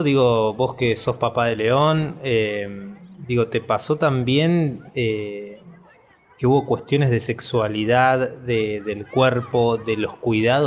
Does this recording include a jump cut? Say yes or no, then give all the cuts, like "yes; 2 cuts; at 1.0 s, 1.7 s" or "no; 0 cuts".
no; 0 cuts